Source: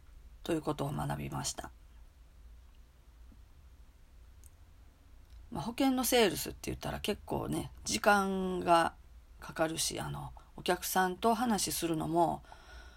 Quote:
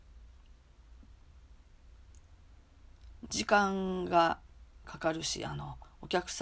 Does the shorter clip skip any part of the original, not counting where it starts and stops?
yes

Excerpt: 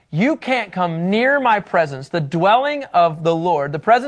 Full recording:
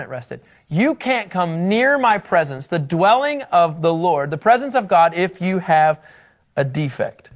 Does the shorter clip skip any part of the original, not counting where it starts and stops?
no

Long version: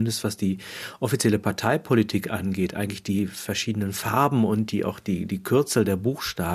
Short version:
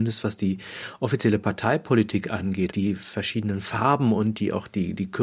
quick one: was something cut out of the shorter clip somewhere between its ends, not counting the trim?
yes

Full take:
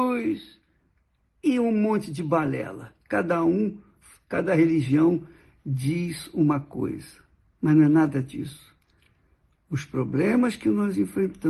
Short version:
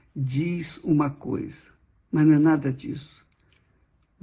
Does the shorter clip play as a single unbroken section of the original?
yes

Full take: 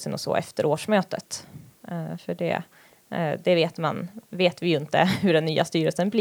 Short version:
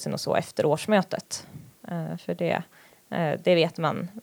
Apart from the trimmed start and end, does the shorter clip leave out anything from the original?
no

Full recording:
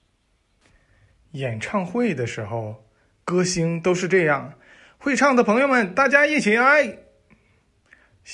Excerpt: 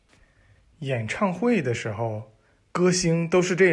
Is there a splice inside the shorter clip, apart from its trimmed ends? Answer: no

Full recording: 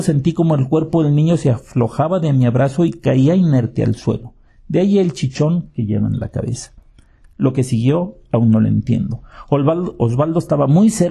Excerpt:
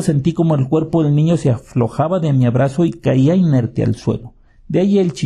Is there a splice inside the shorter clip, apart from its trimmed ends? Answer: no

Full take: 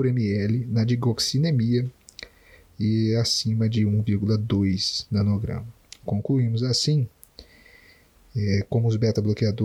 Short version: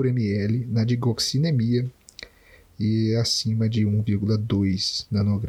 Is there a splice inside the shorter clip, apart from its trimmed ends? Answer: no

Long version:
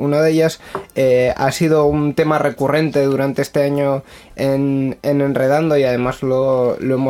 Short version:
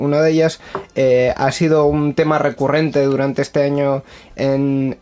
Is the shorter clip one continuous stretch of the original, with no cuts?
yes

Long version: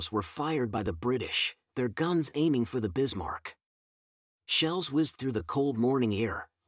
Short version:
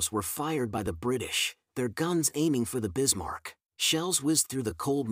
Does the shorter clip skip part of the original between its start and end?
yes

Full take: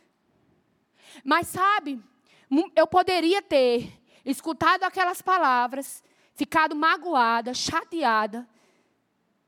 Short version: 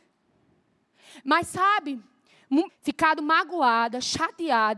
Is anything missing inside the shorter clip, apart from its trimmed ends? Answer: yes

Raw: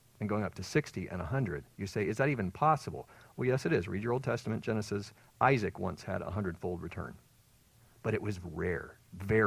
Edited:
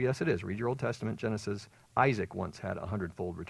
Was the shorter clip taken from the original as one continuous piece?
yes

